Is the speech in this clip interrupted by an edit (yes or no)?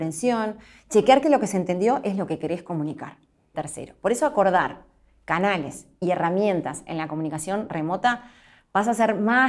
yes